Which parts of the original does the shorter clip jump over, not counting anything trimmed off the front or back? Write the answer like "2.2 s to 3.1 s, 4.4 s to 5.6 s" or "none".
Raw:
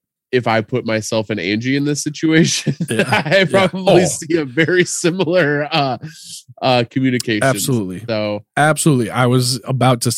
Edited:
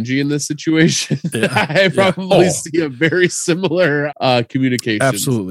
5.7 s to 6.5 s